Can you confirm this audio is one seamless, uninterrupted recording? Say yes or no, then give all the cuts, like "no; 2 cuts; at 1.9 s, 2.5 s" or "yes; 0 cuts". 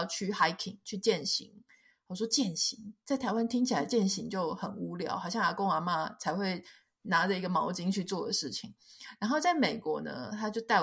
yes; 0 cuts